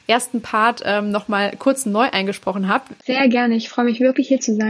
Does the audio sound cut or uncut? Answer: cut